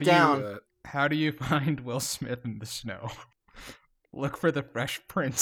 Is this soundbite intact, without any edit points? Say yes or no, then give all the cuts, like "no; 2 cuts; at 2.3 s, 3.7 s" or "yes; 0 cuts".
no; 1 cut; at 3.3 s